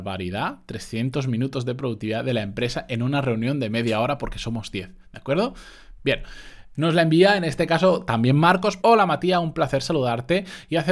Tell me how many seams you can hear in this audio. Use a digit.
2